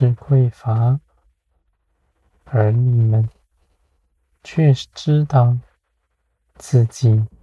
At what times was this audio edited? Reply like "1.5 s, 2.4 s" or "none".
none